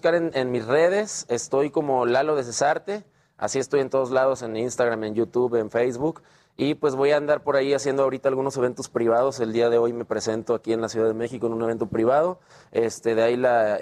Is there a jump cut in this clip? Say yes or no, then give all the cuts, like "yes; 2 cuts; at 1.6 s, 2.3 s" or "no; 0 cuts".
no; 0 cuts